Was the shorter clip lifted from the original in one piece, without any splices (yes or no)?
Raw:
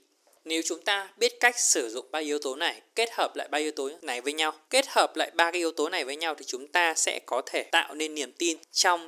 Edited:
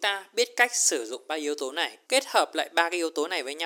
no